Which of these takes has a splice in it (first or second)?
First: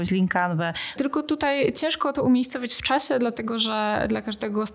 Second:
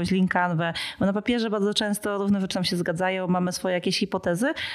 first